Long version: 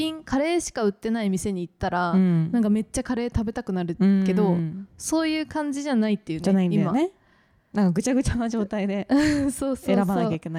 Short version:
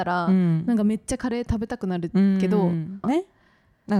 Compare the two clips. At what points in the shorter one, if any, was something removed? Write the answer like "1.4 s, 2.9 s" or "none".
3.0 s